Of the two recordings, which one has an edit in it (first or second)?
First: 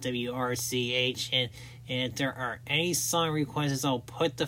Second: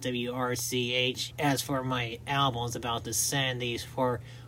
second